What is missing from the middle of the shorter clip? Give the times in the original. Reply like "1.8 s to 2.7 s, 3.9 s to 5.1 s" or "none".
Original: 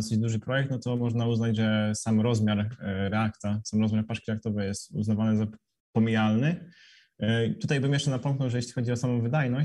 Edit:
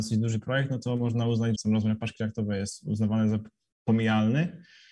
1.6 s to 3.6 s